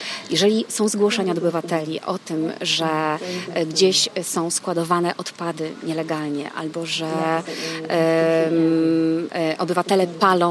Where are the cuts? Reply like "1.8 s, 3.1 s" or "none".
none